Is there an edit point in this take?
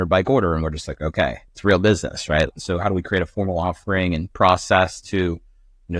yes; 2 cuts; at 1.5 s, 2.5 s

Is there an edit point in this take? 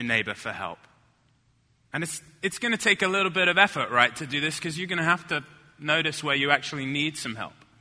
no; 0 cuts

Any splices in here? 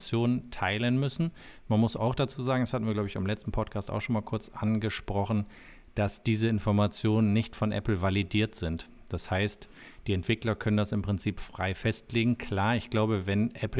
no; 0 cuts

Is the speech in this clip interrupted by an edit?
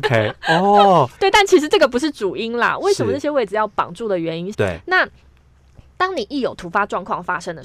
yes; 2 cuts; at 1.2 s, 4.5 s

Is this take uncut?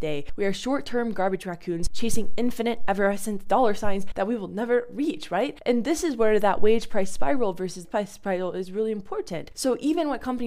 no; 2 cuts; at 7.8 s, 9.5 s

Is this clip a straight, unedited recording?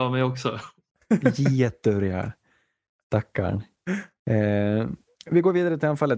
yes; 0 cuts

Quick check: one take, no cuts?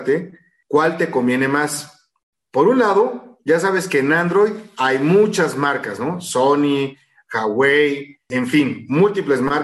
yes; 0 cuts

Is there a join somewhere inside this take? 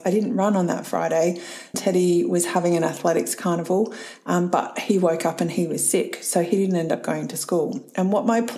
yes; 1 cut; at 1.7 s

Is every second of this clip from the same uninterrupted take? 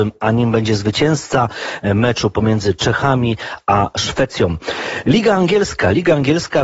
yes; 0 cuts

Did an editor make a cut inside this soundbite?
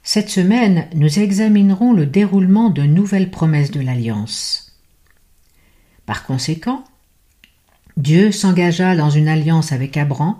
yes; 1 cut; at 5.9 s

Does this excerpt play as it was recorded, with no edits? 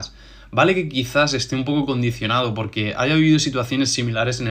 yes; 0 cuts

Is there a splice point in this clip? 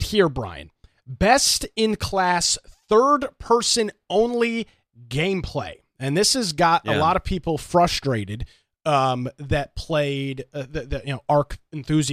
no; 0 cuts

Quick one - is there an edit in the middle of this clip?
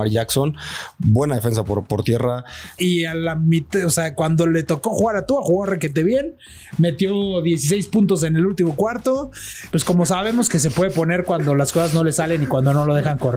yes; 2 cuts; at 2.8 s, 9.7 s

